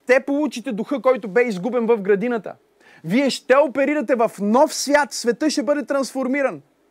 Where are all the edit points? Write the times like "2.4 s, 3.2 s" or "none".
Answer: none